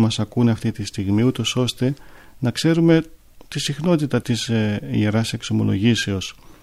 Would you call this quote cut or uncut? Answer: uncut